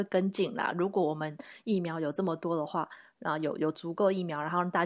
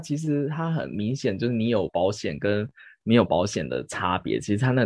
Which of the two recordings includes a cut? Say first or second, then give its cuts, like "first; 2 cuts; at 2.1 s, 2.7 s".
second; 2 cuts; at 1.9 s, 3.3 s